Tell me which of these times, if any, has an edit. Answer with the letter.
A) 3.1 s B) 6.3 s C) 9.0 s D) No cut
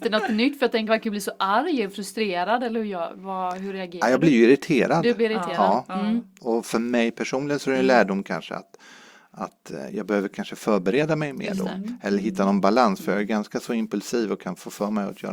D